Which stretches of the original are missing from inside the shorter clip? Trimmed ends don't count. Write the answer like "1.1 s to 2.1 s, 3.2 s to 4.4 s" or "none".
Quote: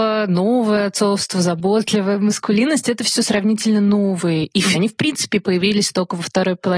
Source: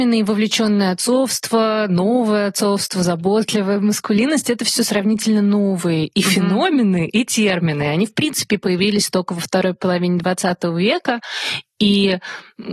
6.3 s to 7.9 s